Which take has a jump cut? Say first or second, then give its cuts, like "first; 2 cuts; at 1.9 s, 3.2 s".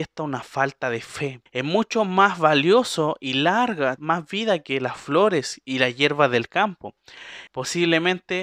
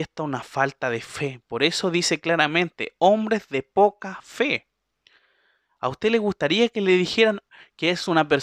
first; 3 cuts; at 1.5 s, 4.0 s, 7.5 s